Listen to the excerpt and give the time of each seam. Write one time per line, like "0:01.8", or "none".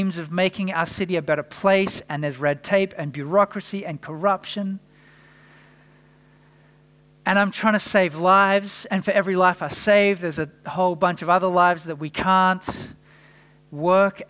none